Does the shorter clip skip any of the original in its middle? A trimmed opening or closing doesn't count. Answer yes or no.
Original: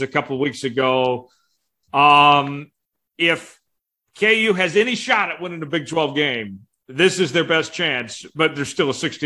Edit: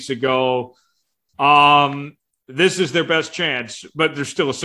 yes